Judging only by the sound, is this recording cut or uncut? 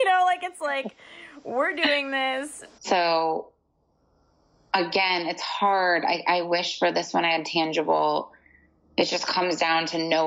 cut